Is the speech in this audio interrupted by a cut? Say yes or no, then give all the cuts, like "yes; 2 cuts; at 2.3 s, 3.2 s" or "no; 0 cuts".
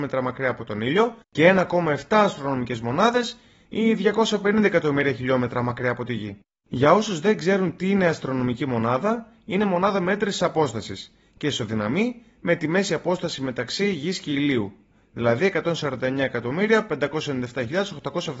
no; 0 cuts